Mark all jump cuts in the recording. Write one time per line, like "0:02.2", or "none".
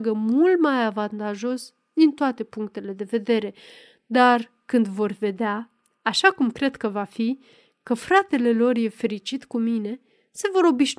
none